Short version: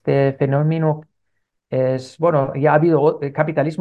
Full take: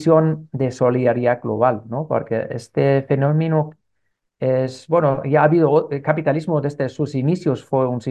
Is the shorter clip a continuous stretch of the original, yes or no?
yes